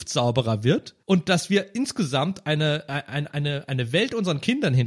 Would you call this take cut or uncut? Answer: cut